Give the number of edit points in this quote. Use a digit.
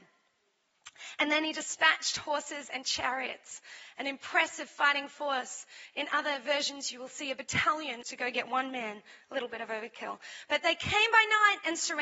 1